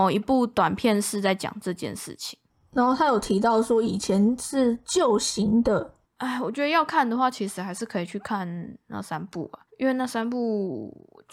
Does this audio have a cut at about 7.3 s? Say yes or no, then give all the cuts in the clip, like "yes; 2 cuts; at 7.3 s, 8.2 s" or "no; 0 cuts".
no; 2 cuts; at 6.0 s, 9.7 s